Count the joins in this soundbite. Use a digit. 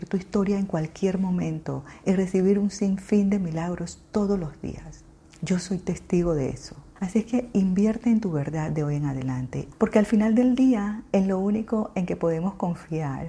2